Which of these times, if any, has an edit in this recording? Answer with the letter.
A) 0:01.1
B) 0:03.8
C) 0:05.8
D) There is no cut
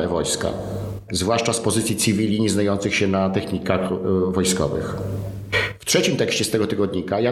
A